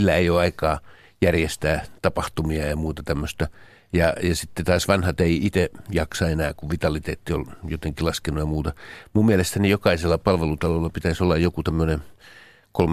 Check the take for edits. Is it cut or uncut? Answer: uncut